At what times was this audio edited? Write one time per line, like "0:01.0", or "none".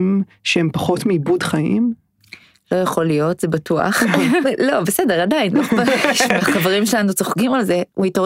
0:04.4
0:06.4